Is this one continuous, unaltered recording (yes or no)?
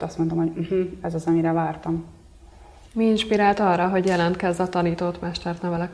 no